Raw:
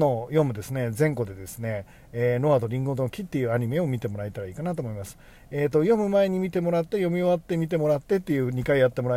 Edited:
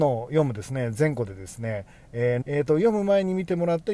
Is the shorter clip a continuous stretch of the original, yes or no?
no